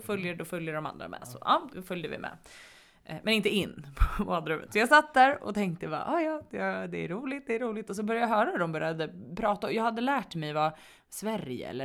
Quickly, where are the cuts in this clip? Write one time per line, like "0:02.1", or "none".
0:01.7